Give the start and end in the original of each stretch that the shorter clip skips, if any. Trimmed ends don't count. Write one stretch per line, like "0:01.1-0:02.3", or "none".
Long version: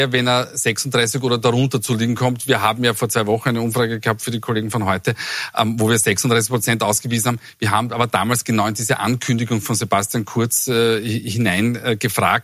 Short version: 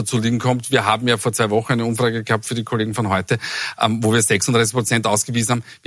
none